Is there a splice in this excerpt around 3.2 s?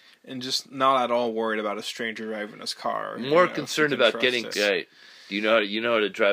no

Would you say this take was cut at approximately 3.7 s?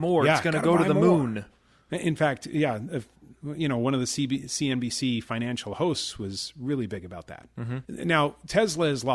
no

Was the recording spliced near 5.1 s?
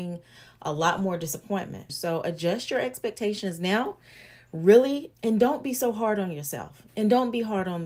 yes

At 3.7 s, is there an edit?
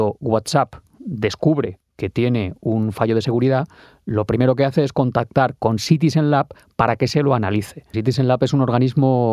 no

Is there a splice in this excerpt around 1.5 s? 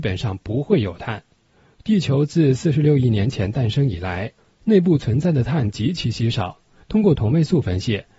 no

